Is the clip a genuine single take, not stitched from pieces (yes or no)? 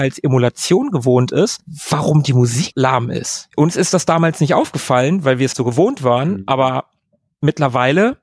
no